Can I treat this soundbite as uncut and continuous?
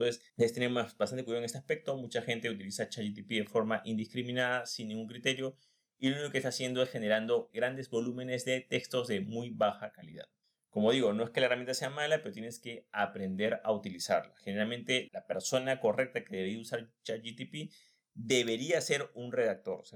no; 1 cut; at 15.1 s

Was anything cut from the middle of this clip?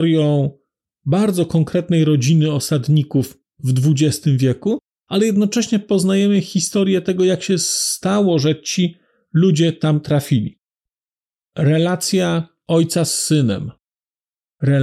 yes; 1 cut; at 11.4 s

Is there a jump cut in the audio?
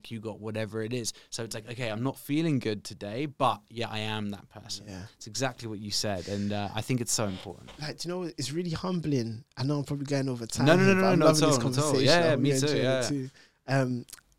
no; 0 cuts

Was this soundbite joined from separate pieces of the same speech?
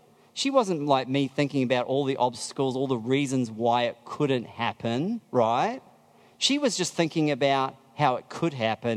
no; 0 cuts

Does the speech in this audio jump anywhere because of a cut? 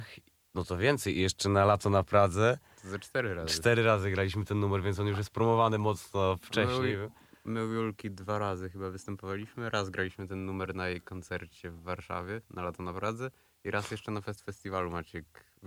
no; 0 cuts

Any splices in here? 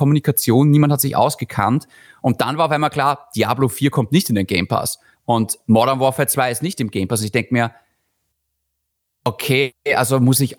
no; 0 cuts

